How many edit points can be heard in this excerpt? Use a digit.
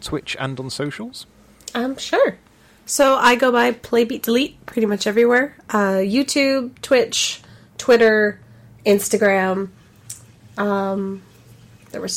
0